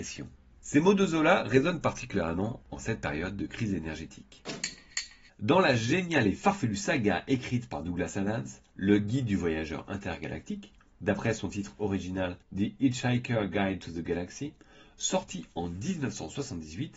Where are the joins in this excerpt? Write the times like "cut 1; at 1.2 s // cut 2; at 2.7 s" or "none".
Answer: cut 1; at 5.3 s // cut 2; at 11.0 s